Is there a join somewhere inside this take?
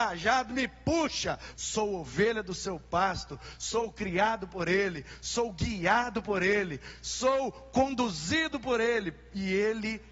yes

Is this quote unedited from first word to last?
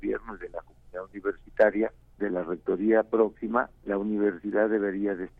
no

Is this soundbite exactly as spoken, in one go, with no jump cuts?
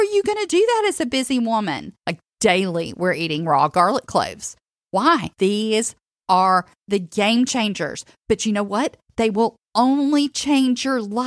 no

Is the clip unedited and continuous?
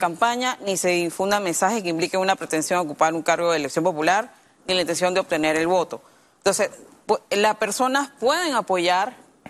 yes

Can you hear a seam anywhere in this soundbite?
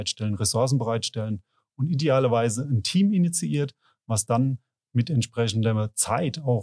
no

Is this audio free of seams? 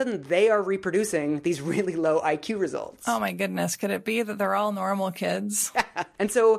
yes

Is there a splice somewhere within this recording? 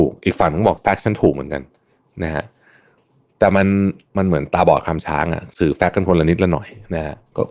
no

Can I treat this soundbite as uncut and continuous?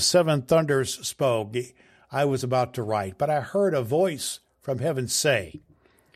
yes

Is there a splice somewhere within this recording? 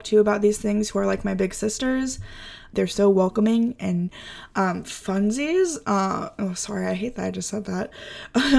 yes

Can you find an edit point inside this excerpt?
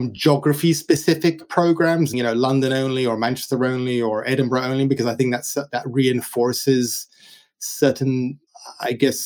yes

